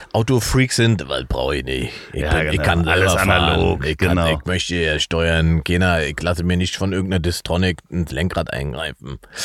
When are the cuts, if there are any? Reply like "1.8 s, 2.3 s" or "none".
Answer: none